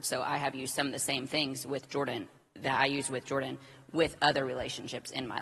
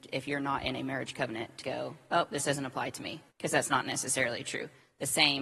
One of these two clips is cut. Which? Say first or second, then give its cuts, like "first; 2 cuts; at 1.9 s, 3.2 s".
second; 2 cuts; at 1.6 s, 3.3 s